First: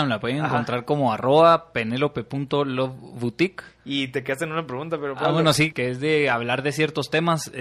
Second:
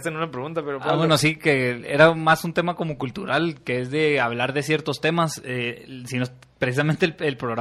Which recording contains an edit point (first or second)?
first